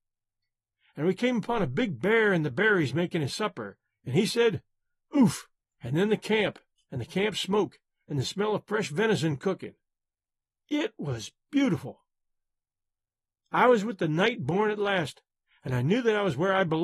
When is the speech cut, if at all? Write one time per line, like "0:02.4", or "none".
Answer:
0:05.6